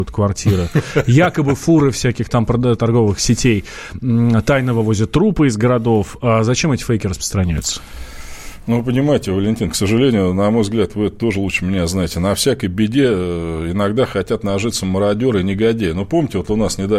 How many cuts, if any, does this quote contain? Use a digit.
0